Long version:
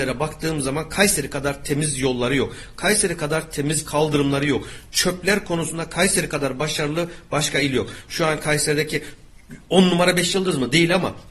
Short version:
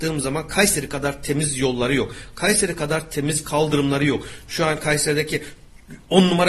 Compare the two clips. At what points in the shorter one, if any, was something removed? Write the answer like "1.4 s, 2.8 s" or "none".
4.4 s